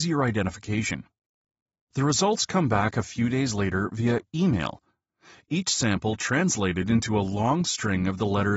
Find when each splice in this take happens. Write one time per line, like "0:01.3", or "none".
0:01.9